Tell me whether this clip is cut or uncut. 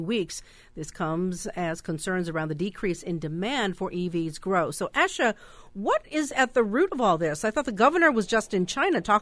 uncut